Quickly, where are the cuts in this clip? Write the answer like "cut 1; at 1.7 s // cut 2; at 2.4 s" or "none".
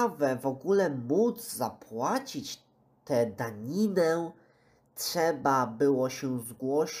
none